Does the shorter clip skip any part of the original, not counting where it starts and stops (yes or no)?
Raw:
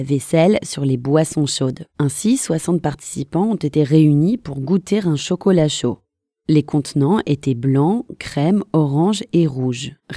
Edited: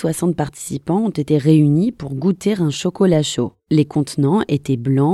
yes